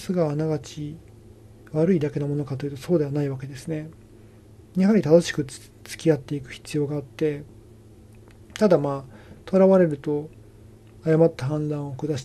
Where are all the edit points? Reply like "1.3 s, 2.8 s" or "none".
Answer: none